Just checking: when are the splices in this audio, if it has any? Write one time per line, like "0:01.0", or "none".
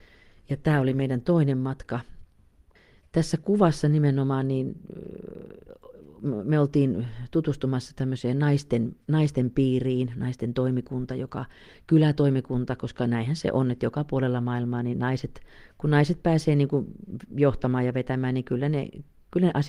0:09.0